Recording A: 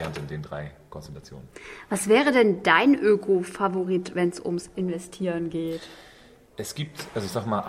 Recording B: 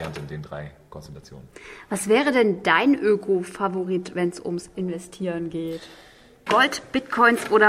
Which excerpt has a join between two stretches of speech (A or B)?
B